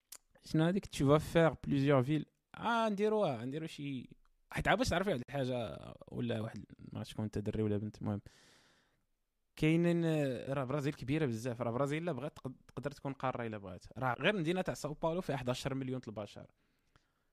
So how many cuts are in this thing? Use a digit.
2